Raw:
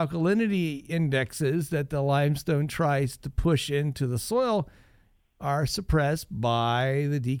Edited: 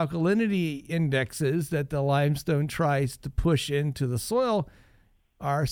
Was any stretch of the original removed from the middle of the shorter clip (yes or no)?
no